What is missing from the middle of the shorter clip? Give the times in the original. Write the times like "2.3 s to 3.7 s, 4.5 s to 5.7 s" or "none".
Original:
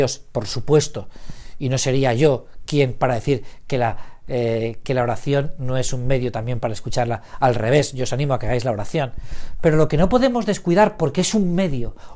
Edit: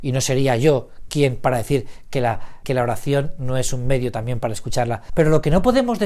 4.2 s to 4.8 s, 7.3 s to 9.6 s